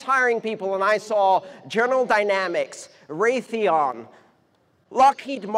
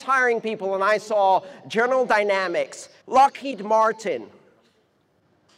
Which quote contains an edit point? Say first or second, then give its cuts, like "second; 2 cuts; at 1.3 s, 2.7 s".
second; 1 cut; at 3.0 s